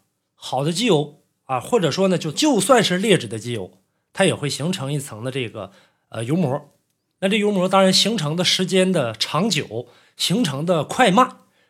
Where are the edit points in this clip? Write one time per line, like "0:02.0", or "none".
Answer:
0:02.3